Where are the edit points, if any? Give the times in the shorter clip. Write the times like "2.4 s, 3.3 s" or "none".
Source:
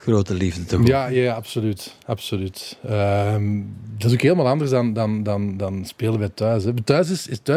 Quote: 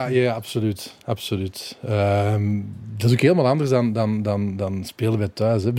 none